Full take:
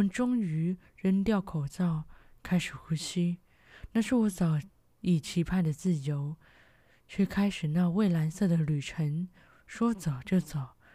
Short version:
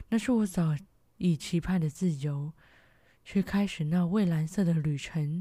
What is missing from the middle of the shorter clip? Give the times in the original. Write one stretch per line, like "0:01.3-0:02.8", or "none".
none

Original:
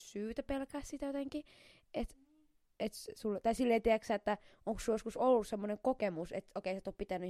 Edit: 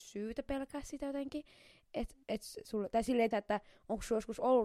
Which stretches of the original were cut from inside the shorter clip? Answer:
0:02.2-0:02.7
0:03.8-0:04.1

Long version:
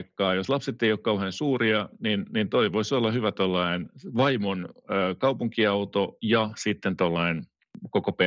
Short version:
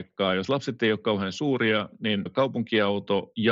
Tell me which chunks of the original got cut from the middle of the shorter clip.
0:02.3-0:05.1

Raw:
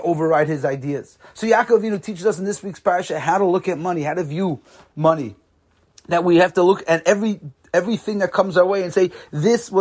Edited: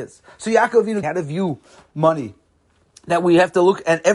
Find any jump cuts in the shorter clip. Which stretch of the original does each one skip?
0:02.0-0:04.0

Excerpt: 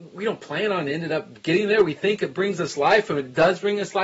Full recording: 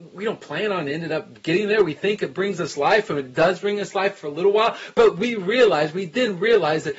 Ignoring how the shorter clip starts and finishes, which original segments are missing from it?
none

